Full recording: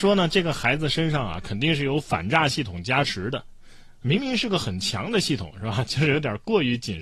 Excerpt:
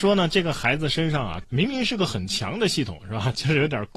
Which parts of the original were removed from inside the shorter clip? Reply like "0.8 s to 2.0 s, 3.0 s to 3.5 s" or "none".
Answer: 1.4 s to 4.0 s

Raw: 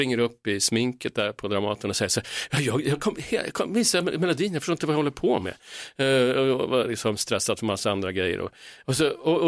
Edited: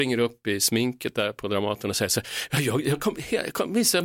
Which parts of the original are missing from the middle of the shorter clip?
none

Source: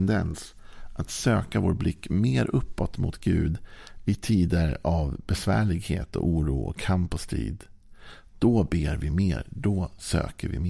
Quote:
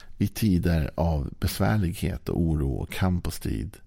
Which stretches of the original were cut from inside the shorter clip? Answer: none

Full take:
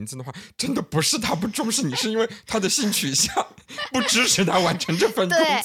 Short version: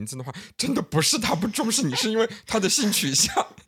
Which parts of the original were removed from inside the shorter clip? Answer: none

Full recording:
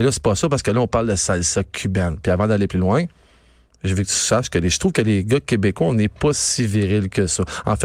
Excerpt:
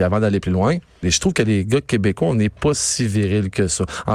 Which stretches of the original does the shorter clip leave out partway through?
3.3 s to 4.6 s

